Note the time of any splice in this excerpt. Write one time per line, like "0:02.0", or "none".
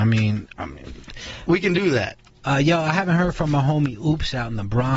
0:02.4